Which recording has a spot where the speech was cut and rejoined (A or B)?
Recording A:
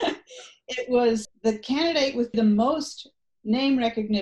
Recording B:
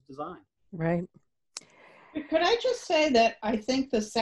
A